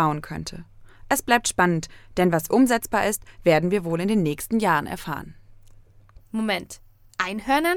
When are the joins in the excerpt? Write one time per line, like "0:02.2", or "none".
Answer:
0:02.5
0:06.2